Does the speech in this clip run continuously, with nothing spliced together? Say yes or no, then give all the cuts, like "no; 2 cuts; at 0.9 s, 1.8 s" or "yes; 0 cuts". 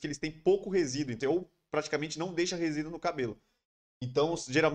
no; 1 cut; at 1.2 s